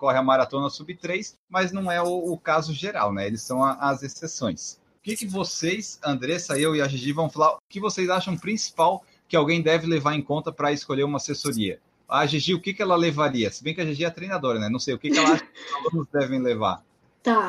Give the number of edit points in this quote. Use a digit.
0